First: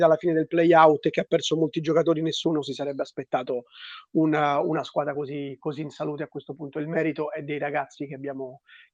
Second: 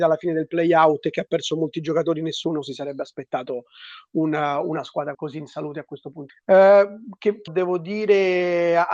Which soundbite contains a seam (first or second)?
second